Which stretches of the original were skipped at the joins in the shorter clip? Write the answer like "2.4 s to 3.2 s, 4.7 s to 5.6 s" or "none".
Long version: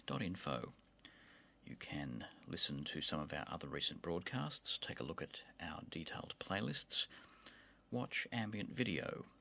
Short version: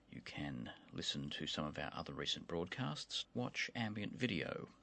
4.8 s to 7.8 s